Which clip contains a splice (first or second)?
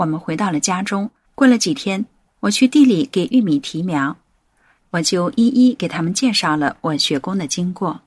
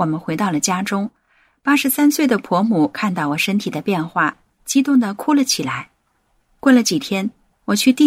first